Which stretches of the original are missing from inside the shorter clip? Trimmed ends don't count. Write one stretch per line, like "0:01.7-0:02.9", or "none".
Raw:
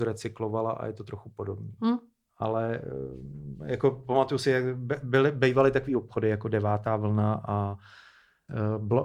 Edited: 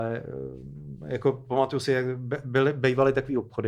none

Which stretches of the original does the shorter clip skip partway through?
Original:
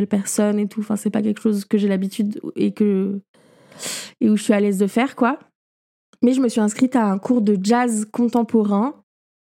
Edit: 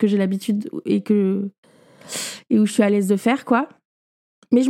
none

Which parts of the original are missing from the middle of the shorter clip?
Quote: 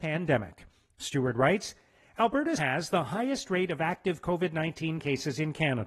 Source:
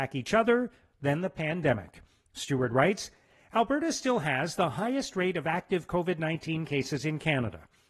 0:03.9-0:04.2

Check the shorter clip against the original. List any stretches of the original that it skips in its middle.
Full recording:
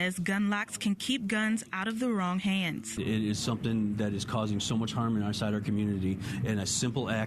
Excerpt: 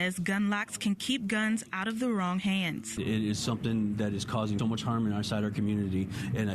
0:04.6-0:04.7

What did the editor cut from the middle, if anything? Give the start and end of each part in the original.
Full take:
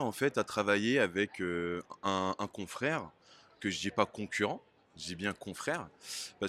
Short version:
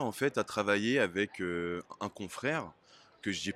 0:02.0-0:02.4

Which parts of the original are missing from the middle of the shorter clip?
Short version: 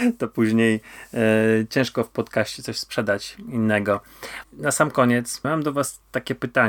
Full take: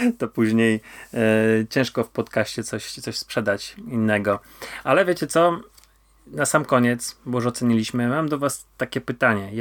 0:02.6-0:02.9
0:04.8-0:06.2
0:07.2-0:08.1

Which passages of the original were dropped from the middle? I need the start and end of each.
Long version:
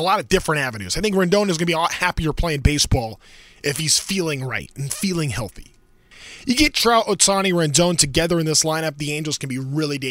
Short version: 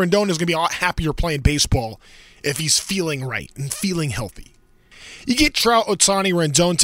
none

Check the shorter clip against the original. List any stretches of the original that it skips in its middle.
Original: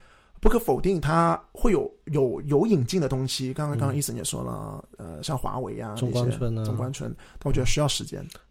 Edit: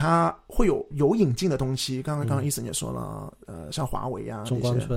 0:02.0-0:02.4

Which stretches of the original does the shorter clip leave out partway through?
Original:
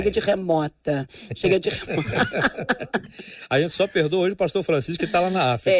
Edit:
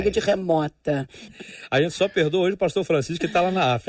0:01.3-0:03.1

